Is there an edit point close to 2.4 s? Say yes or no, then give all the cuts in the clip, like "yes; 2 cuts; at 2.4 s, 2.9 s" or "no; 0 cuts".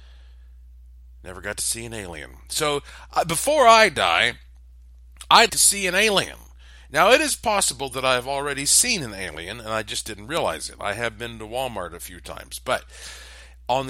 no; 1 cut; at 5.5 s